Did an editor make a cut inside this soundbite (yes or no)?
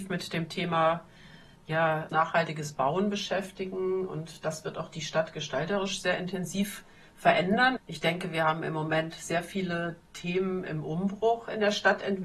yes